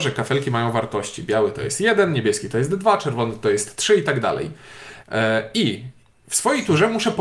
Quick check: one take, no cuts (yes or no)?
no